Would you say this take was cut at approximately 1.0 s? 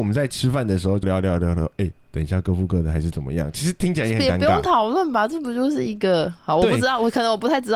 yes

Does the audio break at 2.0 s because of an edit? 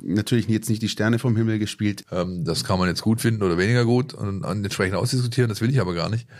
yes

